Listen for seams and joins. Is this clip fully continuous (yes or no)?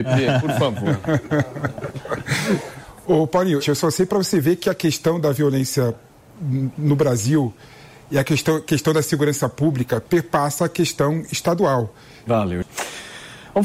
no